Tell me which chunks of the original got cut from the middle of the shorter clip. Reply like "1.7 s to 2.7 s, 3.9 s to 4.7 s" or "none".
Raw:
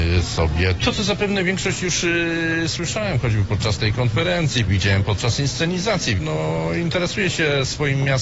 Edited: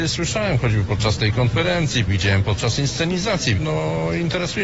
none

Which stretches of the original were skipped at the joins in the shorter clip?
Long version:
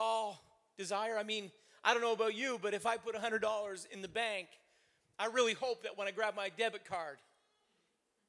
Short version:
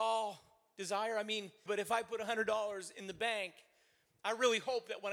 1.7 s to 2.6 s

